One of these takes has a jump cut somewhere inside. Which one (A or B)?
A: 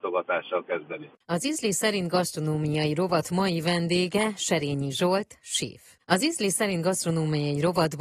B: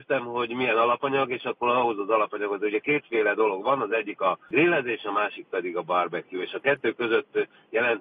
A